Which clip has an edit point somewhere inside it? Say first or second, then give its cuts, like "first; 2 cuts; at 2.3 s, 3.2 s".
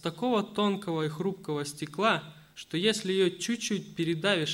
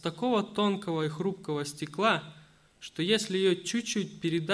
first; 1 cut; at 2.5 s